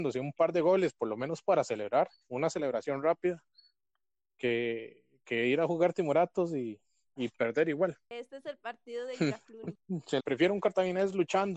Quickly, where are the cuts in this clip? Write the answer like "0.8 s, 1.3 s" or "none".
10.2 s